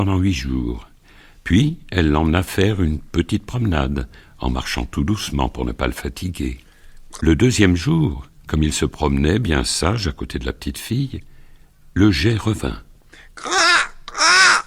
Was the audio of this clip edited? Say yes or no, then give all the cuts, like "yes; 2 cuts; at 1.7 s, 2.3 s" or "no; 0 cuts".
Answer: yes; 1 cut; at 7.2 s